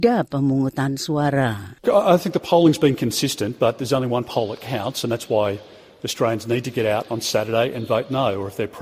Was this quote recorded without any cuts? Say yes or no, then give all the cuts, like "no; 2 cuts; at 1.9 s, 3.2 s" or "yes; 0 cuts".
yes; 0 cuts